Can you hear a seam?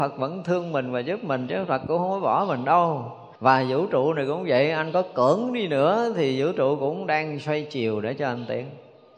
yes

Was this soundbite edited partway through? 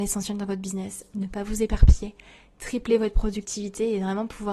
no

